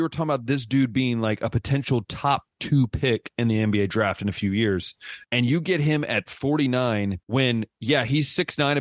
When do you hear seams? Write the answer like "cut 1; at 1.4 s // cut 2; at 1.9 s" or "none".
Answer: cut 1; at 5.2 s // cut 2; at 7.2 s